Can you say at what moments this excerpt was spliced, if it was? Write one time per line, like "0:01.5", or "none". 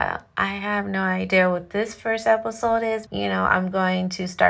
0:03.0